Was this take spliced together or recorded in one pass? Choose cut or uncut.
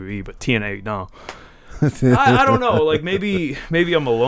uncut